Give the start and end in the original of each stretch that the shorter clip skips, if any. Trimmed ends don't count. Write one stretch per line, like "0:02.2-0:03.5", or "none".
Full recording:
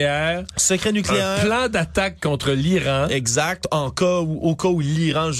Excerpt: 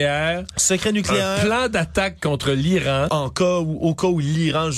0:03.1-0:03.7